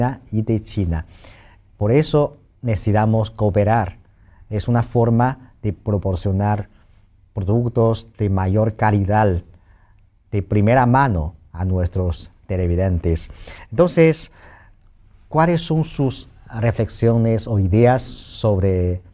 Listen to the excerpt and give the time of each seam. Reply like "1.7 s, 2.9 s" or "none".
none